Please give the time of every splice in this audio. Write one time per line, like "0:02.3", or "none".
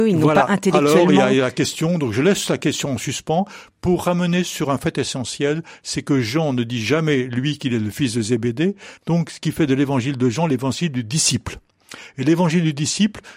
0:09.0